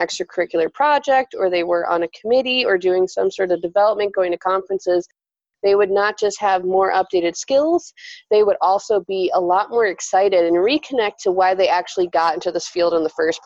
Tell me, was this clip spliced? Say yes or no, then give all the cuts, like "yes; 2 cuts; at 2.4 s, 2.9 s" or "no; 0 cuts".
no; 0 cuts